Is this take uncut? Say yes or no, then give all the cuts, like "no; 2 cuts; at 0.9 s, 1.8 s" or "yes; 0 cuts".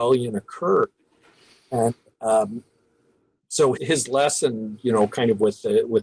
no; 1 cut; at 3.8 s